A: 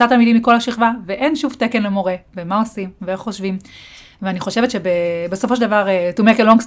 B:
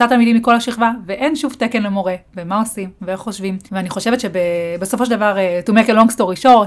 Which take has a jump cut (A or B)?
B